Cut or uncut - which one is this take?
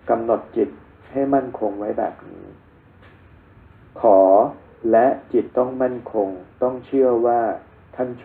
cut